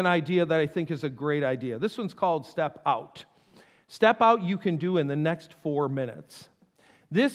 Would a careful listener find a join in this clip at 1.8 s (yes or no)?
no